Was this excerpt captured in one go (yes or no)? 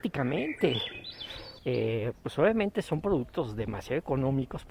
no